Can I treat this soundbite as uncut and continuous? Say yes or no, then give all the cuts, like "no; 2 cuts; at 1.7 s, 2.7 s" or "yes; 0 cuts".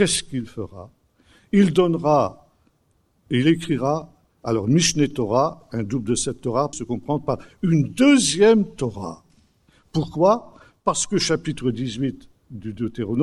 no; 1 cut; at 6.7 s